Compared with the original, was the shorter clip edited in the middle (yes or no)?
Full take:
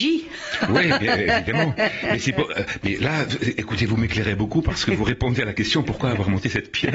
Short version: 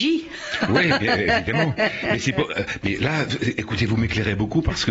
no